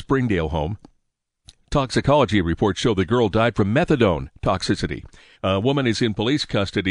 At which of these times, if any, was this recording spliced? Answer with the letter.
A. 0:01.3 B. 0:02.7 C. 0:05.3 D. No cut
C